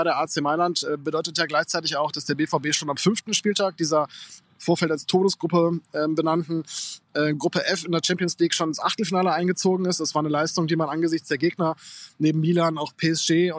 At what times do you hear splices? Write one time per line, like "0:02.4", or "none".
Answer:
none